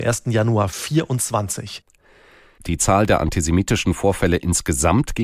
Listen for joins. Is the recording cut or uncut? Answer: cut